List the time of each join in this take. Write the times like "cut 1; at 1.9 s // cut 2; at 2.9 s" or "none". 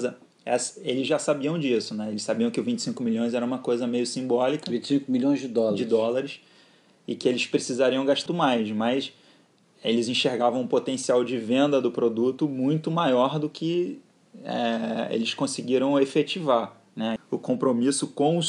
cut 1; at 8.3 s // cut 2; at 17.2 s

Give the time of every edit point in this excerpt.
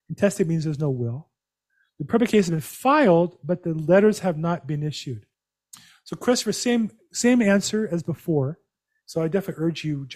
cut 1; at 9.0 s

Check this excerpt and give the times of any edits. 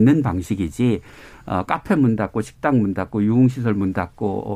none

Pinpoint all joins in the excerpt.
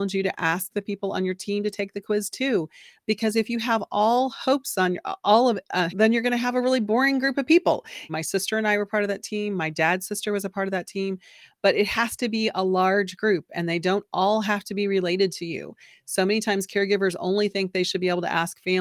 cut 1; at 5.9 s // cut 2; at 8.1 s

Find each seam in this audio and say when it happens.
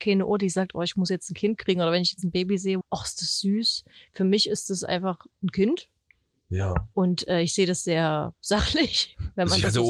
cut 1; at 2.8 s

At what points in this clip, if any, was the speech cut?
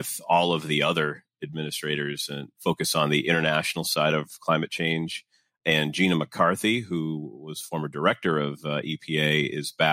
none

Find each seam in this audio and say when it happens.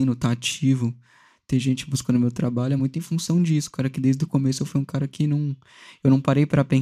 none

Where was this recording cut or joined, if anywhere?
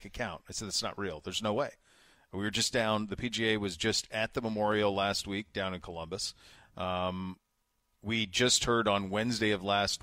none

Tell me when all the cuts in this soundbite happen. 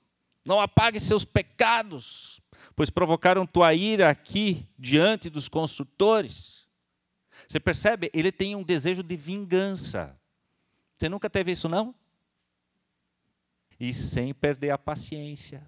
cut 1; at 13.7 s

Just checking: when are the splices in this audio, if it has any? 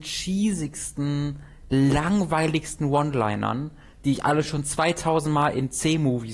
none

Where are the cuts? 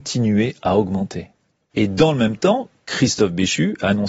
cut 1; at 1.7 s

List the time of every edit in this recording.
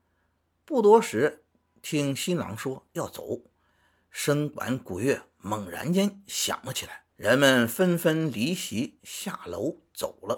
cut 1; at 7.1 s

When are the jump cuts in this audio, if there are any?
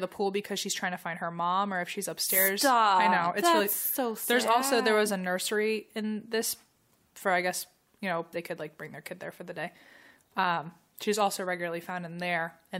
cut 1; at 8.3 s

